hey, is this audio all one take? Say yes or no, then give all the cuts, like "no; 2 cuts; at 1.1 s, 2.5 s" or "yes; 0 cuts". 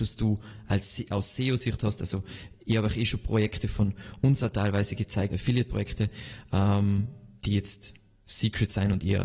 no; 1 cut; at 5.3 s